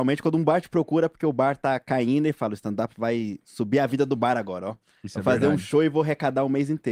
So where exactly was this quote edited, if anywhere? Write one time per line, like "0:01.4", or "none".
none

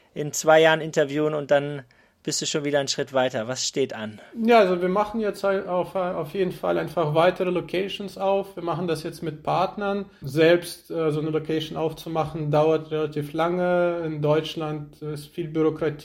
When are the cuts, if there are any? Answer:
0:10.2

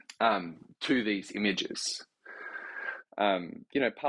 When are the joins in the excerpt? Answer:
0:03.0

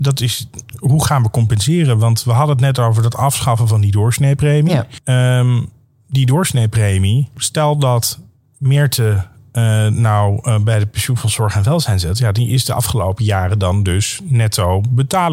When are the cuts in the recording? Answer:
none

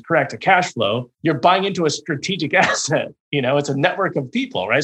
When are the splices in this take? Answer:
0:01.1

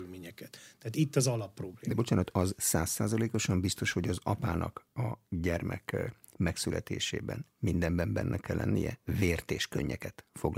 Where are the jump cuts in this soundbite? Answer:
none

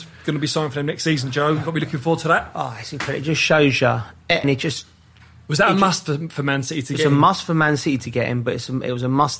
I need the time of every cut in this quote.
0:04.4

